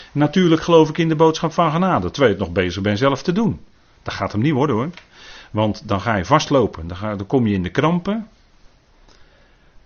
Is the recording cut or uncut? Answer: uncut